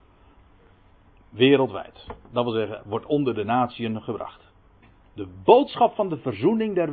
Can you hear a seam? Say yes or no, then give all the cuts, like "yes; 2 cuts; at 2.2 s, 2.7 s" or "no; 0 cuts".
no; 0 cuts